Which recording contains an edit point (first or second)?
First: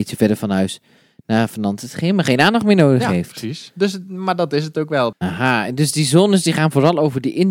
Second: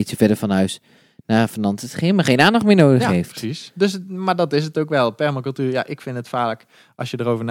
first